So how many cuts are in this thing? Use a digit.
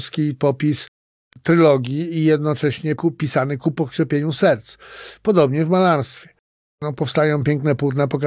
1